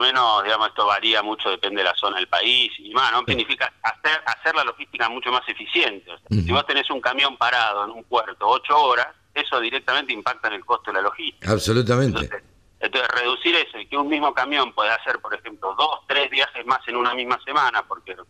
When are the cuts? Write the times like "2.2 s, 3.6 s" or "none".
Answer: 3.3 s, 6.3 s